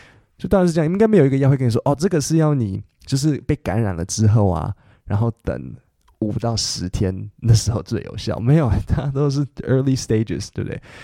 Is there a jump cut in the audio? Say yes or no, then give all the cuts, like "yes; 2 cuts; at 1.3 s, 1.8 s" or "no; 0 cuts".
no; 0 cuts